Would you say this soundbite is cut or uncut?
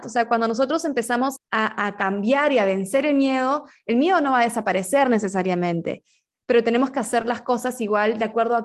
cut